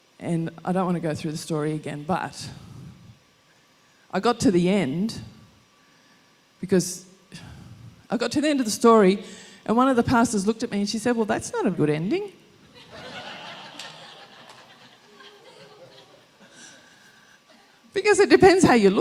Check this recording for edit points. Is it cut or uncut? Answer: cut